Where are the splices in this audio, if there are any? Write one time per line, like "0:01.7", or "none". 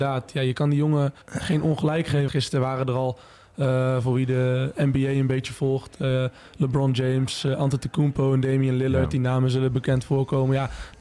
0:01.2
0:02.3